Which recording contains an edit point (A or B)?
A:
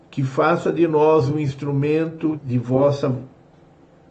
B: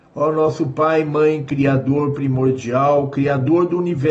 A